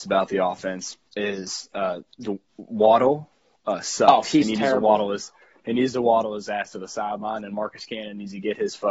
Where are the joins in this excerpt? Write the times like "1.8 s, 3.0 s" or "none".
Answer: 1.1 s